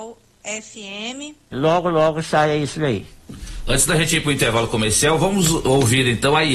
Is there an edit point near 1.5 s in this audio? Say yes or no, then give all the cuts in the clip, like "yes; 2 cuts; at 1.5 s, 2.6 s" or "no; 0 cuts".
yes; 1 cut; at 1.5 s